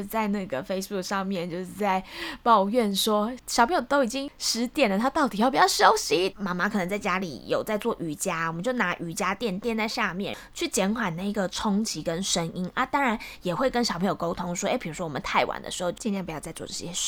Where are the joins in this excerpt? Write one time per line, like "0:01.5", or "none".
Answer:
0:06.3